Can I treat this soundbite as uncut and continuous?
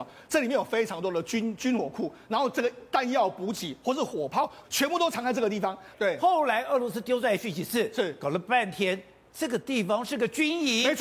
no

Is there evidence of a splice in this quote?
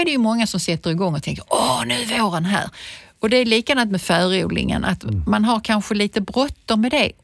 no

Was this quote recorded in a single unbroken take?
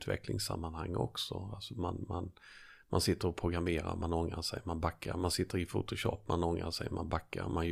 yes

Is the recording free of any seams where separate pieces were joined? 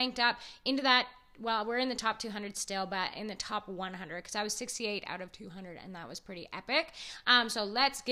yes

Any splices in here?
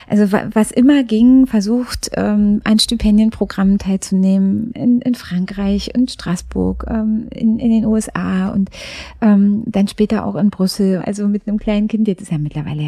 yes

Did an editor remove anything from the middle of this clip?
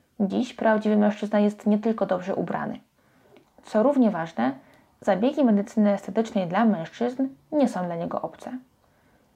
yes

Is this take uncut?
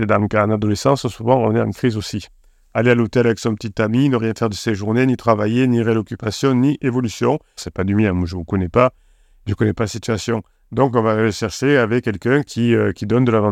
no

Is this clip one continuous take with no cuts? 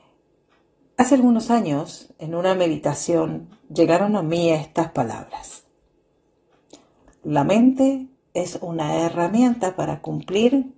yes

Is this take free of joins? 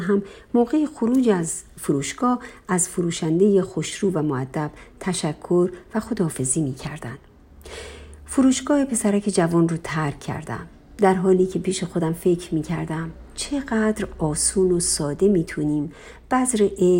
yes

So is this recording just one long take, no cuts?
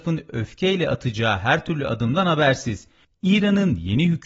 no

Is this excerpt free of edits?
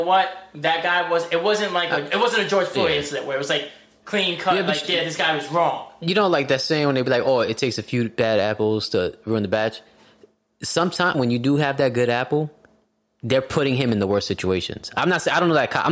no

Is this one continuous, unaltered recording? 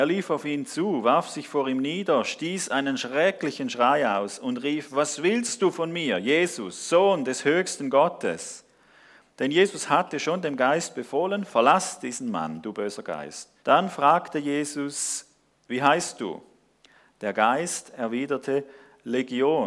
no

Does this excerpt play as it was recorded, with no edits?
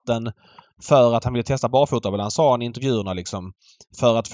yes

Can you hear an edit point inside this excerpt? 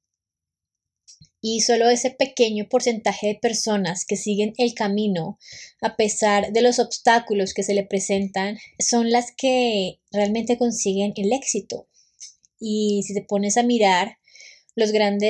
no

